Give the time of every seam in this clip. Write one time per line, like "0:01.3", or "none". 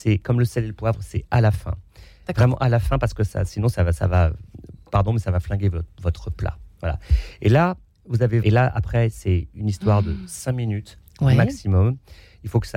0:08.4